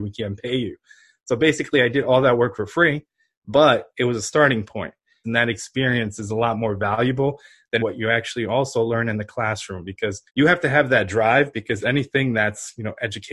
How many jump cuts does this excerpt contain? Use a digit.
3